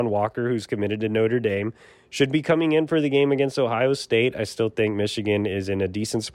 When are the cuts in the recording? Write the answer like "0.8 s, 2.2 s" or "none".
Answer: none